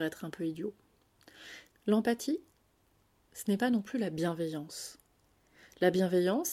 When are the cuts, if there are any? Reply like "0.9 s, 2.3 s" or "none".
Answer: 1.7 s